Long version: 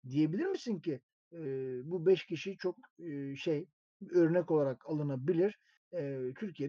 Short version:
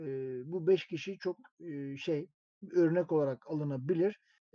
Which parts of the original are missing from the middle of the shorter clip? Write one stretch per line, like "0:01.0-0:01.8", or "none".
none